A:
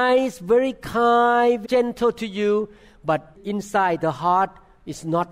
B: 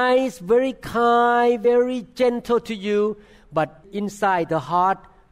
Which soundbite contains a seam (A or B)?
A